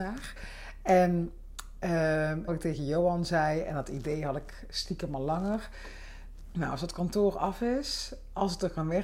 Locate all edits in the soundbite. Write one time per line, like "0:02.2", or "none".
0:02.5
0:06.5